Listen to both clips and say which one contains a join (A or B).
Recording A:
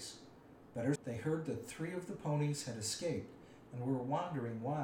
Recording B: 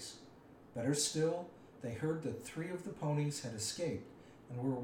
A